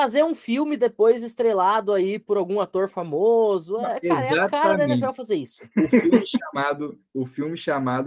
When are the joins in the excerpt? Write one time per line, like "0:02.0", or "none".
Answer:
none